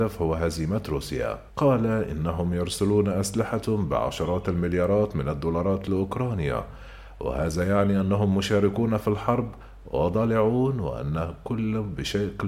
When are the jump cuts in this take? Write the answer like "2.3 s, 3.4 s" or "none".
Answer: 1.5 s